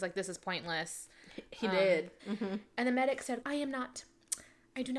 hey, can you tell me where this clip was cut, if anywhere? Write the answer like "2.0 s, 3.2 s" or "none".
2.2 s, 3.4 s